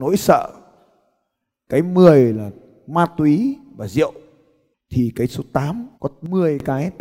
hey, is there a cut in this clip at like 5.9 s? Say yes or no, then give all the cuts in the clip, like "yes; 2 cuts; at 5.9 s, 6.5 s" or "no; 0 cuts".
yes; 1 cut; at 5.9 s